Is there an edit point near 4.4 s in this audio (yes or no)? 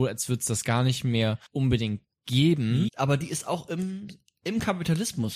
no